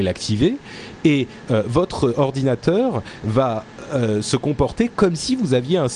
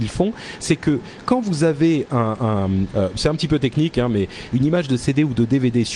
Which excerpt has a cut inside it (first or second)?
second